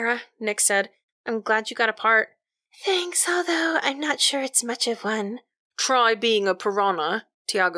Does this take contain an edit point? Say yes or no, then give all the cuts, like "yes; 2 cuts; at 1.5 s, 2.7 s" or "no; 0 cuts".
no; 0 cuts